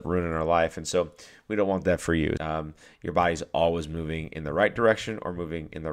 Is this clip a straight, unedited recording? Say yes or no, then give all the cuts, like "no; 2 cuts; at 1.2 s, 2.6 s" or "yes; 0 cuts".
no; 1 cut; at 2.4 s